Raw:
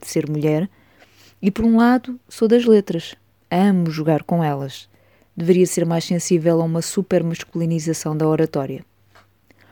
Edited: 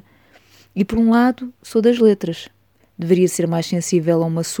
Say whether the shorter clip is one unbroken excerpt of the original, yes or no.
no